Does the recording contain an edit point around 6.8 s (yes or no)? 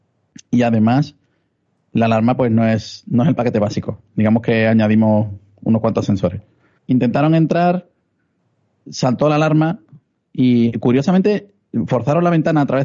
yes